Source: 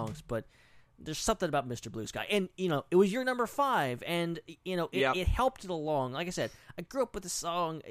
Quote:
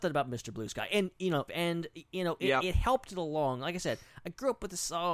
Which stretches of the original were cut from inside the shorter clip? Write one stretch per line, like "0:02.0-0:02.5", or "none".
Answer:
0:02.9-0:04.0